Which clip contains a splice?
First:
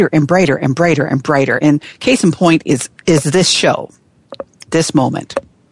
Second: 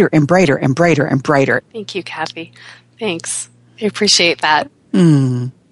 second; 1 cut; at 1.6 s

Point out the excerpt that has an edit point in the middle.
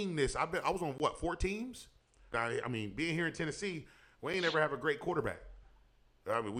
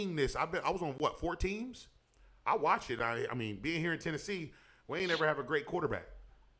first; 1 cut; at 2.3 s

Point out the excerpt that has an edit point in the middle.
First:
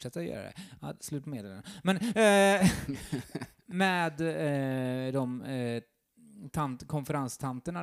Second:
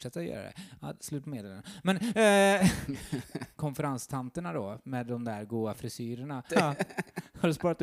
second; 2 cuts; at 3.6 s, 6.5 s

